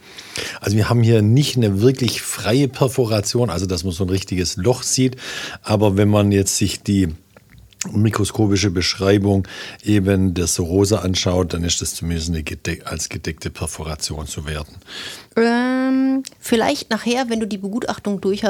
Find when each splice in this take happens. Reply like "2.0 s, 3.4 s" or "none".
15.3 s